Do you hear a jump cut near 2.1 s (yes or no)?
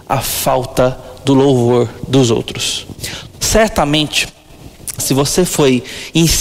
no